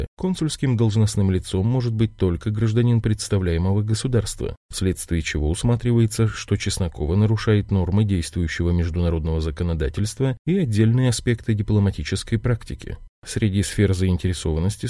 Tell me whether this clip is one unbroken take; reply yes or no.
no